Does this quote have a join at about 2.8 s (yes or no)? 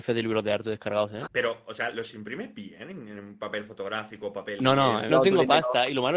no